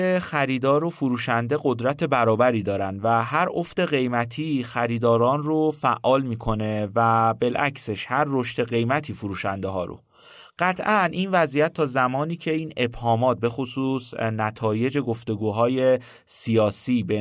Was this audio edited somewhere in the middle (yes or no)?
no